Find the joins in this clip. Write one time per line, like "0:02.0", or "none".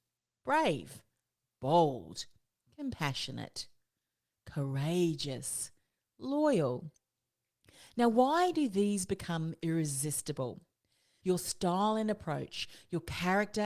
0:11.2